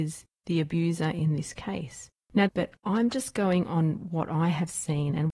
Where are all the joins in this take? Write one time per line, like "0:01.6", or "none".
0:02.5